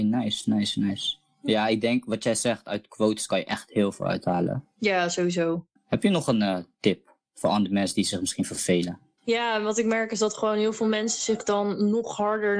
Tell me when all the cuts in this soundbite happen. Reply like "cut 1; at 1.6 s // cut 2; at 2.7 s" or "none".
cut 1; at 9.2 s